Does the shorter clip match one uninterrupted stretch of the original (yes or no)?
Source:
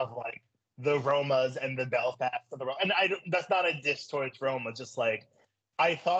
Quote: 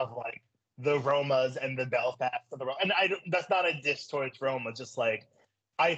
yes